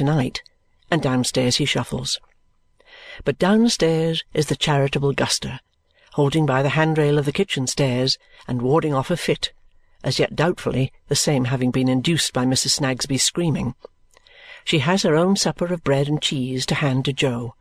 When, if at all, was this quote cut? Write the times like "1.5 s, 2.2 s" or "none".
none